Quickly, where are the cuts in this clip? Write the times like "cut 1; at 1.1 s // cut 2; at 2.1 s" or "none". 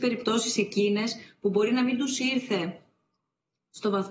none